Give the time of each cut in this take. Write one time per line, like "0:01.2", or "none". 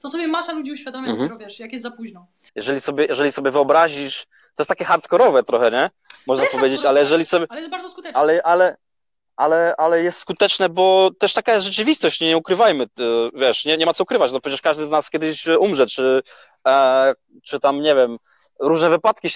0:02.5